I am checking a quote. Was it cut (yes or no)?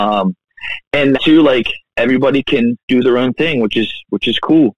yes